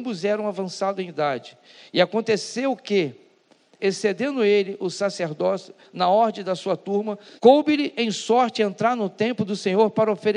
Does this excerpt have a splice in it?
yes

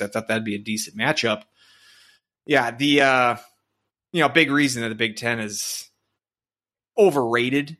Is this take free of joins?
yes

